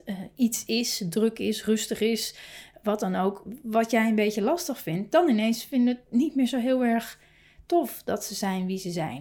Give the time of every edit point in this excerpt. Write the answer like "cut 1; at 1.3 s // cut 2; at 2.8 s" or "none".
none